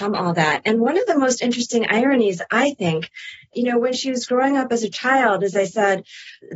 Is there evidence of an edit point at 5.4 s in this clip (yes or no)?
no